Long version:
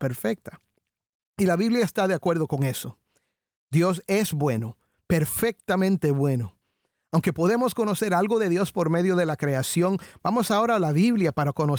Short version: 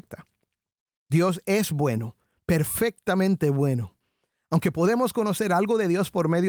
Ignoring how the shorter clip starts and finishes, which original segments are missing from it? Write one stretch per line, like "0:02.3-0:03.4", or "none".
0:01.3-0:03.5